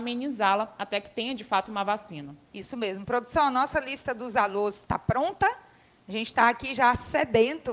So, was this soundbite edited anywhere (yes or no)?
no